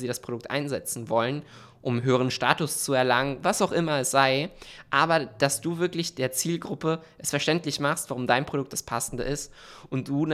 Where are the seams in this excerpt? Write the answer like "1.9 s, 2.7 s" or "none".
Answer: none